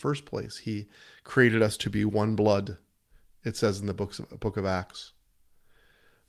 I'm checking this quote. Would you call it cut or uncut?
uncut